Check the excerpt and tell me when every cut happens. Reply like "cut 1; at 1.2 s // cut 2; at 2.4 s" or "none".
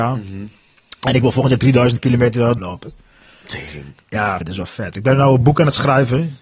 cut 1; at 2.6 s // cut 2; at 4.4 s